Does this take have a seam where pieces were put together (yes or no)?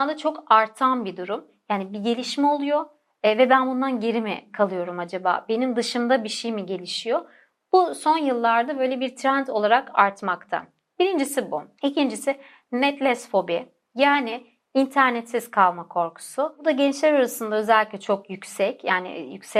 no